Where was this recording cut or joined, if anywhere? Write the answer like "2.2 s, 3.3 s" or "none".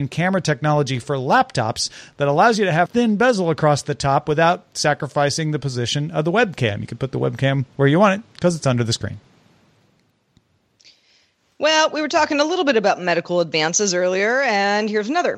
2.9 s